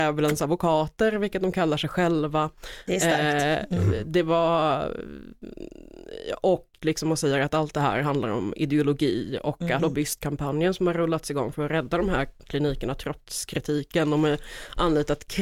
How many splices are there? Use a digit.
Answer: 1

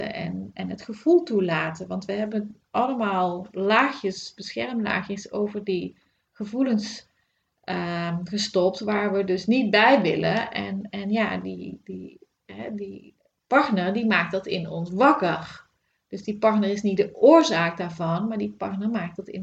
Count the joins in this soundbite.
0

